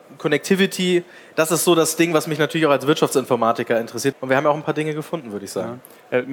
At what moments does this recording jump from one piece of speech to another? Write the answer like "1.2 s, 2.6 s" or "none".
4.1 s